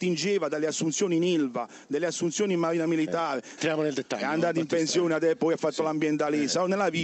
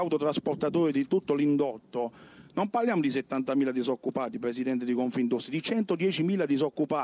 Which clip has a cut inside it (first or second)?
first